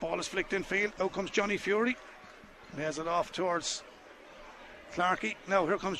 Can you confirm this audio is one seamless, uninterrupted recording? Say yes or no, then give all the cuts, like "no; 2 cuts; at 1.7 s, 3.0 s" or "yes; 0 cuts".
yes; 0 cuts